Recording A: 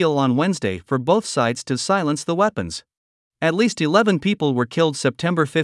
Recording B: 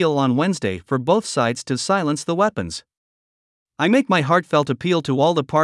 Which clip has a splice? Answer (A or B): A